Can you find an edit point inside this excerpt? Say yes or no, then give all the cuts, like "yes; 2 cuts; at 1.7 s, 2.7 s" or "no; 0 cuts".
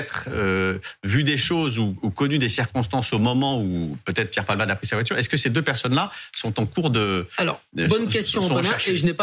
no; 0 cuts